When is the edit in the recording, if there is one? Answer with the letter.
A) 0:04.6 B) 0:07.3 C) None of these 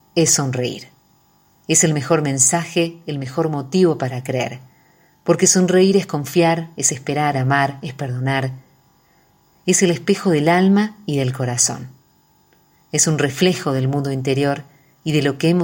B